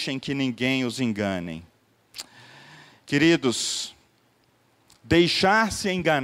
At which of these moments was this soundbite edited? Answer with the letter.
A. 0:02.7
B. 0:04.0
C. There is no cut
C